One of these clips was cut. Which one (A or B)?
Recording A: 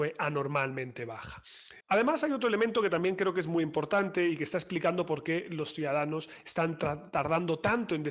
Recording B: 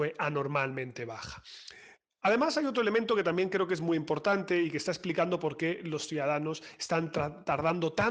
A